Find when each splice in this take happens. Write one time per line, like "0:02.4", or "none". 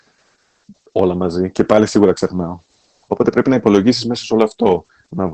0:03.0